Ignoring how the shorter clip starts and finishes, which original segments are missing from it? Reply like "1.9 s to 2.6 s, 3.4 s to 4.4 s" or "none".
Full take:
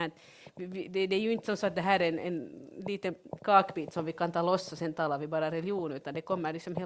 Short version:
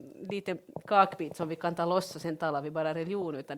none